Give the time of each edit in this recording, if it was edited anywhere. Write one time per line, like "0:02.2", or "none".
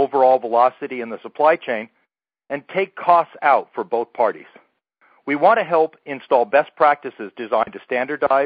none